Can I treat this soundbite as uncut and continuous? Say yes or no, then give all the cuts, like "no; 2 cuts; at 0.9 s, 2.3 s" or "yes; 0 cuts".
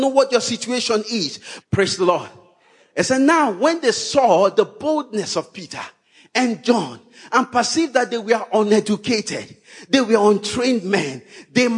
no; 1 cut; at 1.6 s